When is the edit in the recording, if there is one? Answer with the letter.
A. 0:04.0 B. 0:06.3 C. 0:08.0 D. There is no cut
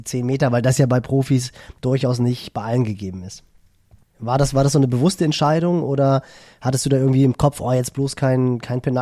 A